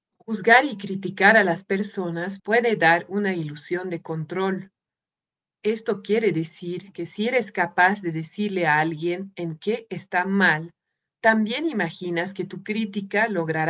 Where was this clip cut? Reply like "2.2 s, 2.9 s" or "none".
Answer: 11.1 s